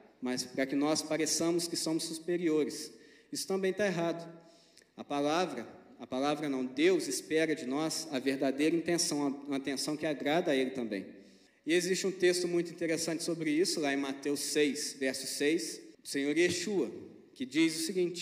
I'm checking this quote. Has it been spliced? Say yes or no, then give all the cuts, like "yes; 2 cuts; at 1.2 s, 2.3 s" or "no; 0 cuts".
yes; 2 cuts; at 11.5 s, 15.9 s